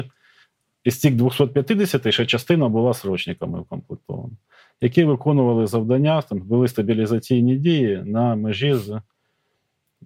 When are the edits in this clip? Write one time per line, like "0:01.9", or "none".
none